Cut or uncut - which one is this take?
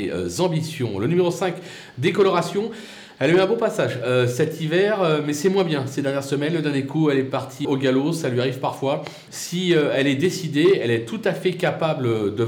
cut